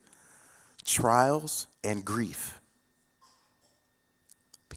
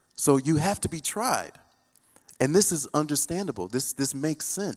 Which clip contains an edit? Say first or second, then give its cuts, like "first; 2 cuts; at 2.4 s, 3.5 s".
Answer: first; 1 cut; at 1.7 s